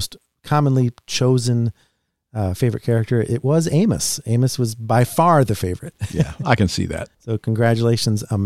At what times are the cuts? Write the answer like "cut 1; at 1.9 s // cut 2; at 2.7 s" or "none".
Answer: cut 1; at 7.1 s